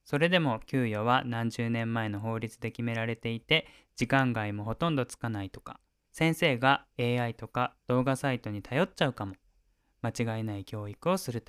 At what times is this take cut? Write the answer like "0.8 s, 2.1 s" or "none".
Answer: 6.0 s